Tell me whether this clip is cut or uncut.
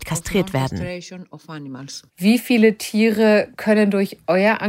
cut